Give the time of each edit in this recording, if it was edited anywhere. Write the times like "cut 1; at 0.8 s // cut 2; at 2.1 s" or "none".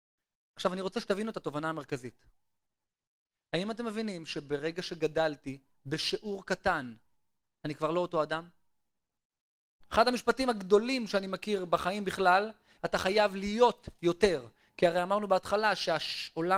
cut 1; at 9.8 s // cut 2; at 12.8 s